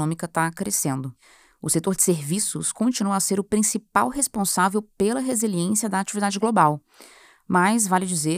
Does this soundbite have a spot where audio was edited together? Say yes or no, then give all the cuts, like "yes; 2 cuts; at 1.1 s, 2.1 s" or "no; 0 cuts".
no; 0 cuts